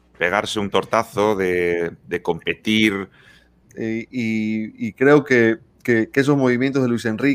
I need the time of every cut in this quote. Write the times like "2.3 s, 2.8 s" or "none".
3.6 s